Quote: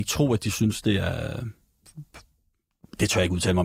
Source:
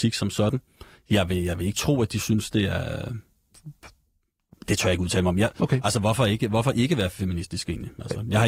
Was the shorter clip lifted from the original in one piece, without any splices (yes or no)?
yes